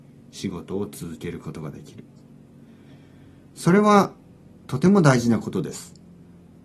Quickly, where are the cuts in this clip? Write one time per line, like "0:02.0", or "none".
none

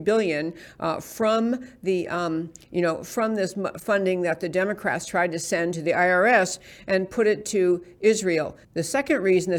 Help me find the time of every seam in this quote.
0:08.6

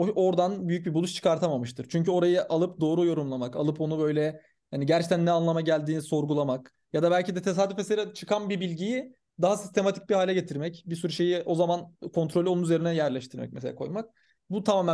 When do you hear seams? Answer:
none

